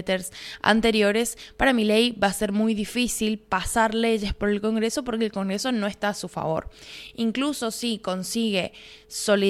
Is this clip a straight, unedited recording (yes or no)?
yes